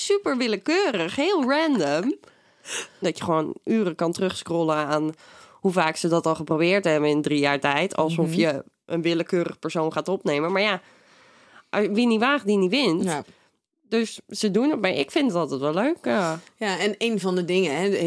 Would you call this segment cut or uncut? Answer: cut